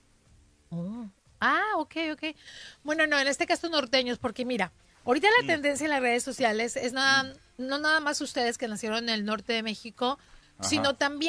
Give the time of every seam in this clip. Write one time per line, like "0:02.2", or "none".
none